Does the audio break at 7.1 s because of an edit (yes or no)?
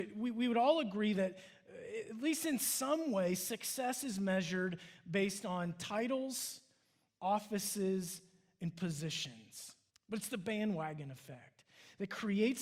yes